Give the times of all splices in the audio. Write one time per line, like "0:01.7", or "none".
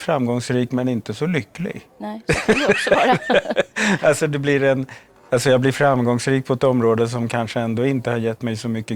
none

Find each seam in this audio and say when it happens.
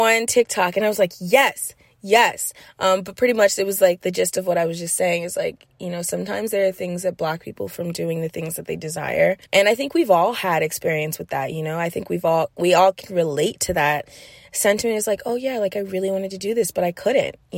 0:09.4

